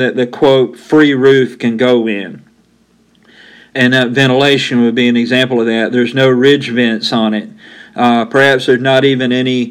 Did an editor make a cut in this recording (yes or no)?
no